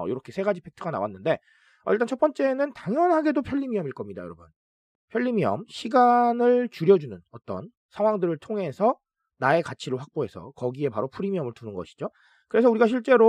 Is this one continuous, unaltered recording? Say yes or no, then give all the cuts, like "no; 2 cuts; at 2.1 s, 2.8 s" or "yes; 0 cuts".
yes; 0 cuts